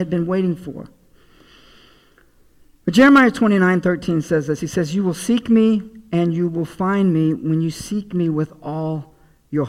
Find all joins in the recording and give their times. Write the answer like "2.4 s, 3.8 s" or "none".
none